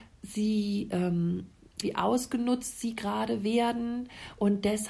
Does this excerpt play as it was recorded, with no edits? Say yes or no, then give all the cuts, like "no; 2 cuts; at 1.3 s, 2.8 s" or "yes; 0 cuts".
no; 1 cut; at 1.8 s